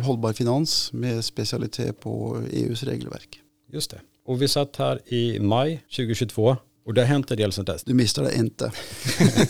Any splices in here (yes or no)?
yes